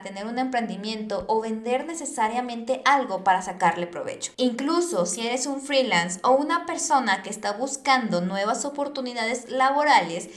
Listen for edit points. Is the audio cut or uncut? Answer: cut